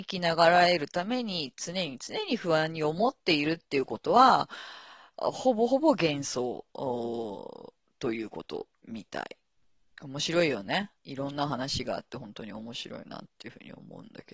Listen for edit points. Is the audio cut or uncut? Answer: cut